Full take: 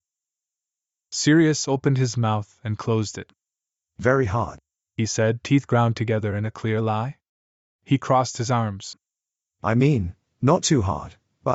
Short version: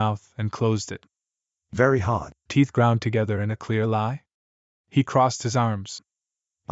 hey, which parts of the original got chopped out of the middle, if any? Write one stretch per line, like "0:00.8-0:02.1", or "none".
0:04.7-0:05.4